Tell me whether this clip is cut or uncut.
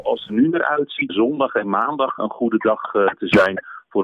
cut